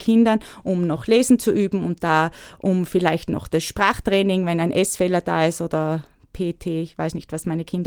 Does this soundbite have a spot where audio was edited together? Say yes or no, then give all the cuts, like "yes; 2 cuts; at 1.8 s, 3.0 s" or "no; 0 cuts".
no; 0 cuts